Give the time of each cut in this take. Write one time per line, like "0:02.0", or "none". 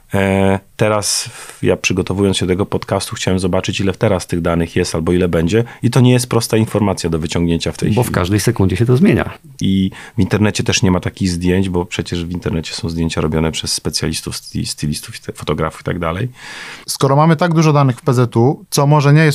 0:09.6
0:16.8